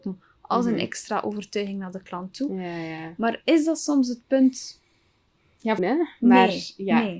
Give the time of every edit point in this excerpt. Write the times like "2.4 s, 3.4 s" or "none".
5.8 s